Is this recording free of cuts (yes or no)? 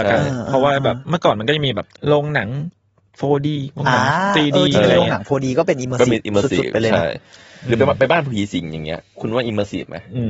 no